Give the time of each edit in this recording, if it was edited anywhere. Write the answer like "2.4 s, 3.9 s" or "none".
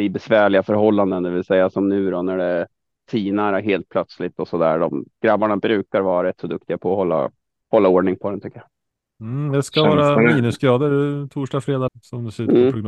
11.9 s